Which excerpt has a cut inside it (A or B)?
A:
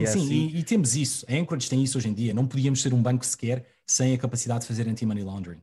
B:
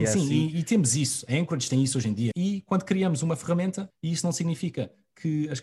B